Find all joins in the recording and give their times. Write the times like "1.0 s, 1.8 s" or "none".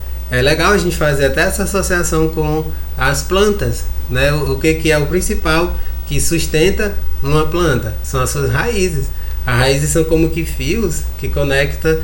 none